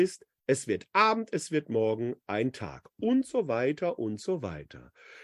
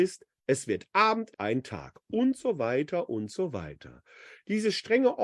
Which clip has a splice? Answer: second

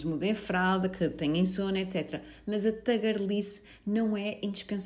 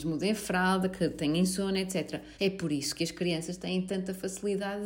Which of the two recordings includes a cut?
second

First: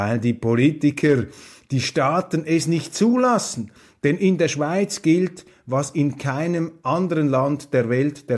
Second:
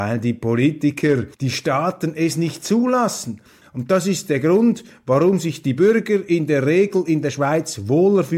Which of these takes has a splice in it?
second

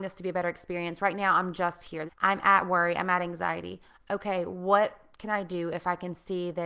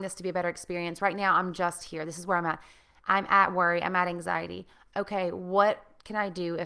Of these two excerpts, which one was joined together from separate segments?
first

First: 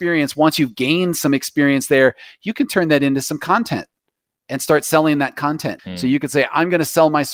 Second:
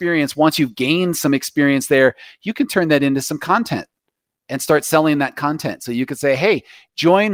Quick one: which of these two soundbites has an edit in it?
first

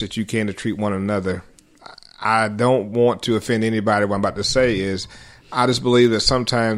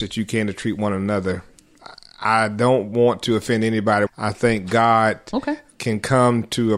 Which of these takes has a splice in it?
second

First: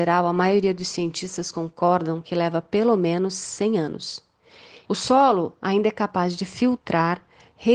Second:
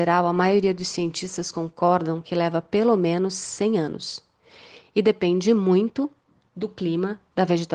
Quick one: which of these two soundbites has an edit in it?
first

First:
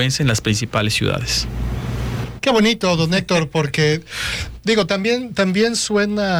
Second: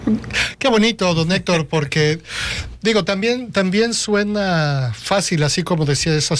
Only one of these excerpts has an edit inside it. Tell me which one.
first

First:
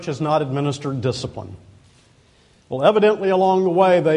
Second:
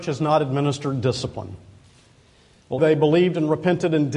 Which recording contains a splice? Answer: second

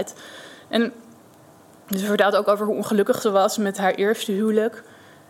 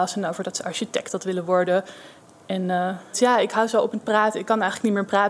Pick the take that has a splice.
second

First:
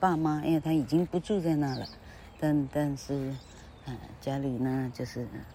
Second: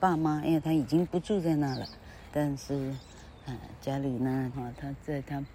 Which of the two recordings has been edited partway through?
second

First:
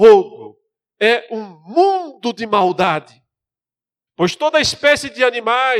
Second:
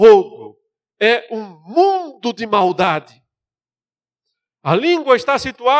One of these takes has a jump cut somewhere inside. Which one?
first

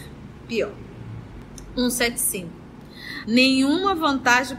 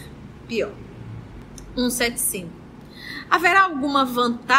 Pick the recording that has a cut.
first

